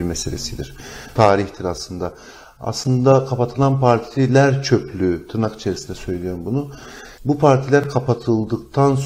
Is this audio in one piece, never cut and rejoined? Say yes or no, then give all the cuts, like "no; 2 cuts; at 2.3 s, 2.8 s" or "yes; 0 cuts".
no; 2 cuts; at 1.2 s, 7.2 s